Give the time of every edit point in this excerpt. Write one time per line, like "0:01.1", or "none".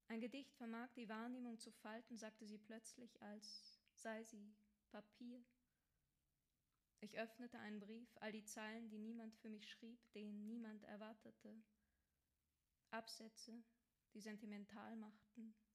none